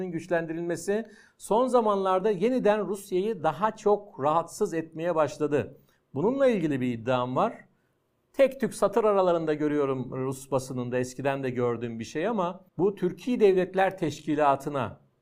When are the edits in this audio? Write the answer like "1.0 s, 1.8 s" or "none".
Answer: 12.7 s